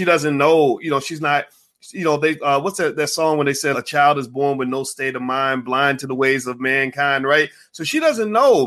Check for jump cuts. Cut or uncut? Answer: cut